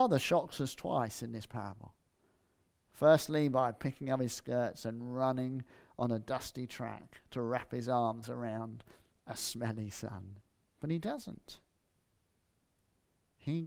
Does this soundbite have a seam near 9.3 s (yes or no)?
no